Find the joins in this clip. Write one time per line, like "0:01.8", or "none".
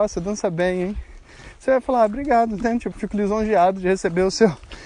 0:02.9